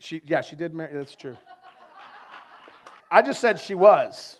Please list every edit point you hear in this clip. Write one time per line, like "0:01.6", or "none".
0:03.0